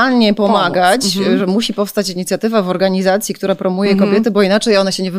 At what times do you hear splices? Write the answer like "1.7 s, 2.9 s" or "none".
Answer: none